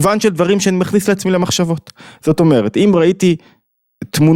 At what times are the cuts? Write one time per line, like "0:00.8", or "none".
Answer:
none